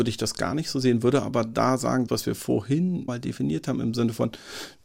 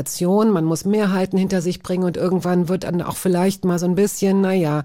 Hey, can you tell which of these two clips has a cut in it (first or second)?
first